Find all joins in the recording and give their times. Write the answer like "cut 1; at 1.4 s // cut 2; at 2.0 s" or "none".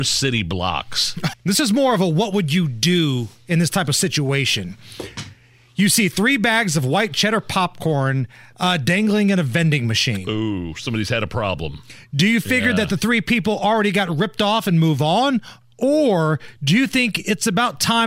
cut 1; at 1.3 s